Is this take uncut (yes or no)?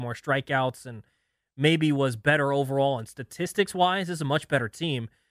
yes